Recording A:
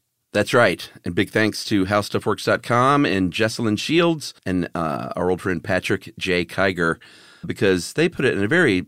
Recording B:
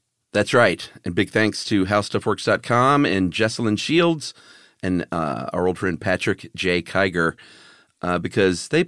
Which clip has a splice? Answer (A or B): A